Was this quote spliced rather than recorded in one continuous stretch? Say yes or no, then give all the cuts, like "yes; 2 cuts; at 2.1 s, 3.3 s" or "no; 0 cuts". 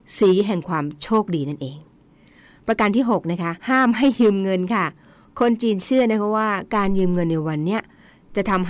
yes; 1 cut; at 3.6 s